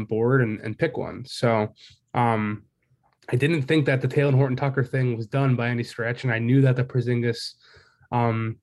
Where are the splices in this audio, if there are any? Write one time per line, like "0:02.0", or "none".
none